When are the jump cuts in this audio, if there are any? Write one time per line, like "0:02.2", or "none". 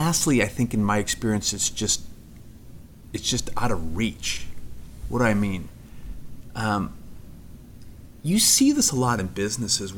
none